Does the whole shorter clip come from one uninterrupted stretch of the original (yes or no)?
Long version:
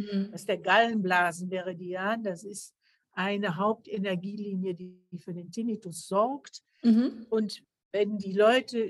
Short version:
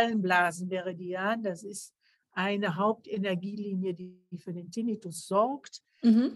yes